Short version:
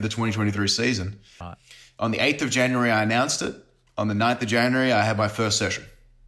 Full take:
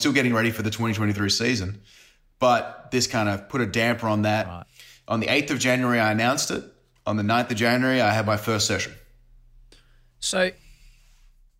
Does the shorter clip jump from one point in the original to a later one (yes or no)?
yes